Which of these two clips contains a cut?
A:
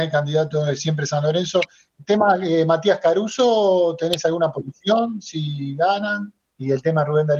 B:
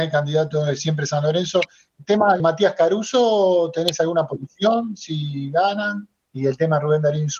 B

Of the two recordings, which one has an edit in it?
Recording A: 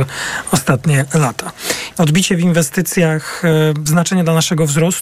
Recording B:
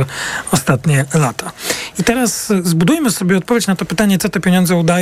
A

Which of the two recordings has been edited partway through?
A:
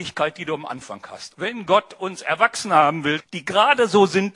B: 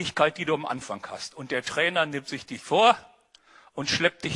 A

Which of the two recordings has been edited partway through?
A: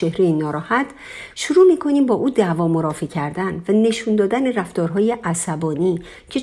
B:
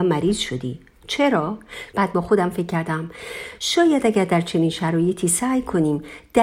B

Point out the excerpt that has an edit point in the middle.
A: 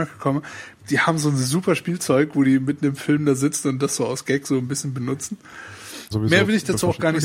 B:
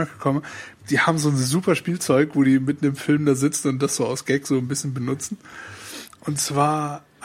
A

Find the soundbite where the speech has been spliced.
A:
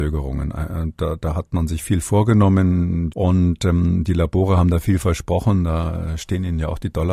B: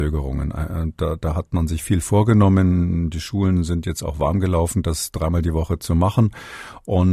A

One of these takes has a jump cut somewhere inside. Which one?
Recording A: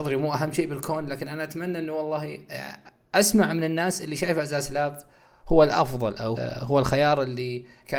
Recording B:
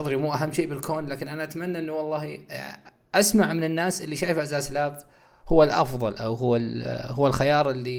A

